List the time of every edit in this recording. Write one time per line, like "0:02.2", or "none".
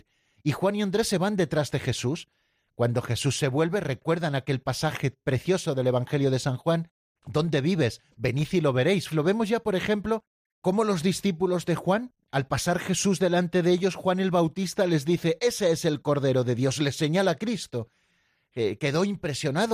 0:07.2
0:09.1